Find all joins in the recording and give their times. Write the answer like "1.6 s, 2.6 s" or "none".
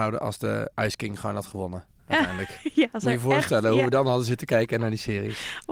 none

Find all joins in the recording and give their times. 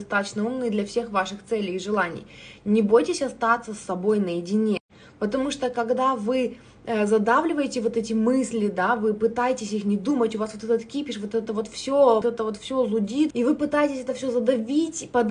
12.2 s, 13.3 s

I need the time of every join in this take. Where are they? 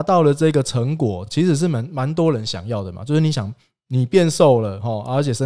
none

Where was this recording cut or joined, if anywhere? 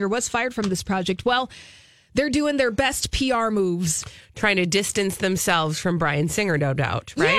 none

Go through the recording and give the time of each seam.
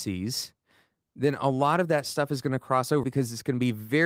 3.0 s

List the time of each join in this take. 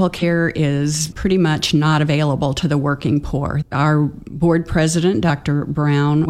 3.6 s

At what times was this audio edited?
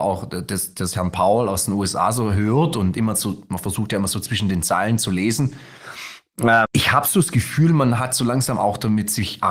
6.6 s

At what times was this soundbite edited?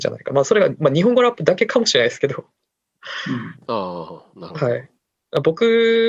none

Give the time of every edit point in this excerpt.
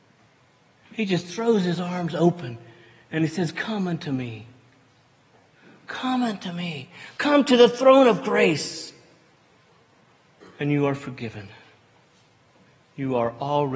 none

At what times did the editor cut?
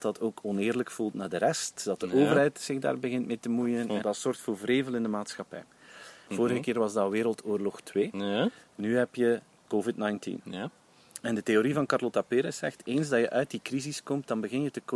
4.0 s, 6.3 s

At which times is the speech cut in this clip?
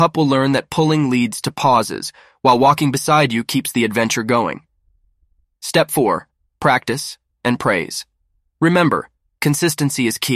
7.3 s

